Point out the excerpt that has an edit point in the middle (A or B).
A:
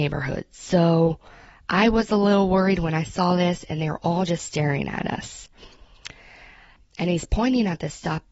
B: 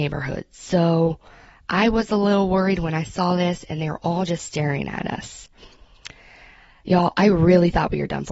A